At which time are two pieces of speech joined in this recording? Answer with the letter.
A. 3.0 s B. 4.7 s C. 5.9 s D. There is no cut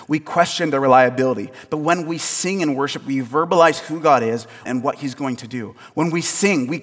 B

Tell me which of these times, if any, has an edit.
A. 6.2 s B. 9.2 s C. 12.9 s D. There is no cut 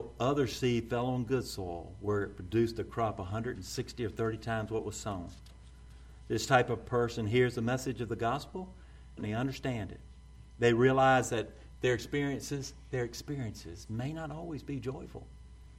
B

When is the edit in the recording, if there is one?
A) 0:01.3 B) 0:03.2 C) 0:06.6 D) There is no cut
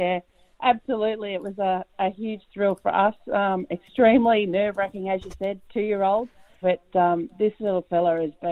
C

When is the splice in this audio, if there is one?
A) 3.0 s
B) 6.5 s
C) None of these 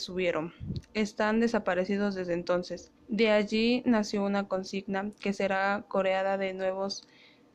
A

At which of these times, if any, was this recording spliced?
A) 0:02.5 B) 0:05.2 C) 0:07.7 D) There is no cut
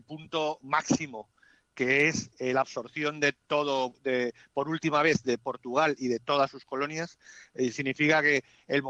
C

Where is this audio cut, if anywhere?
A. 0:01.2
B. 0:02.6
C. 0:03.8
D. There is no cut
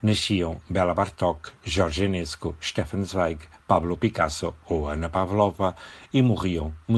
D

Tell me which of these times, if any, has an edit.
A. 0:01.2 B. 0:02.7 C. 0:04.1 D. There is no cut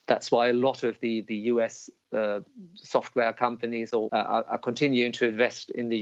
C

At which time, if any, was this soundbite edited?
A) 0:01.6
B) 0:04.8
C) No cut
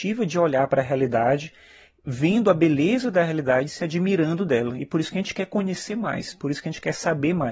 C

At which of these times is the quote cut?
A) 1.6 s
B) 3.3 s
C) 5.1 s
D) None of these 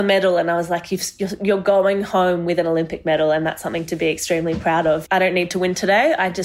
C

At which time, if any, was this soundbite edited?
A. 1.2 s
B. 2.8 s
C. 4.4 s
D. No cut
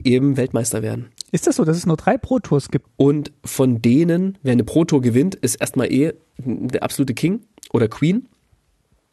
B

